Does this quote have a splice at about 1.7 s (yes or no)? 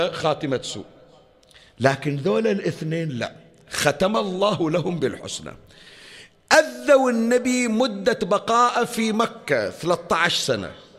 no